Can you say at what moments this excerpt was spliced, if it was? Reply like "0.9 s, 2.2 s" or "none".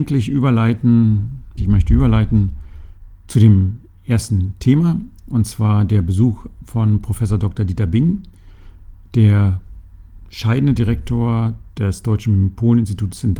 1.6 s, 11.7 s